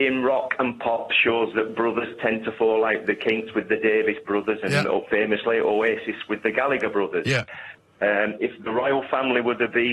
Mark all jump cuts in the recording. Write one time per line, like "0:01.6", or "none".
none